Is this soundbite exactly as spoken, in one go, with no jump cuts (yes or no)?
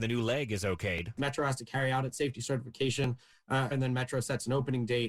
no